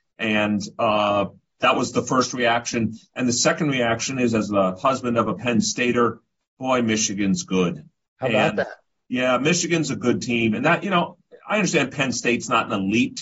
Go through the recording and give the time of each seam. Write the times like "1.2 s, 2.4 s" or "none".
none